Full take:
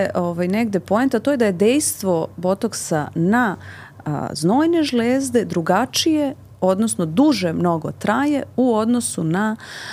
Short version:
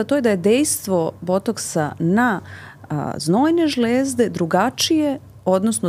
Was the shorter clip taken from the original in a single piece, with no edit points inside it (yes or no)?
yes